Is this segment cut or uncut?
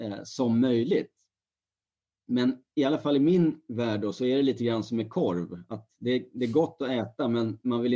uncut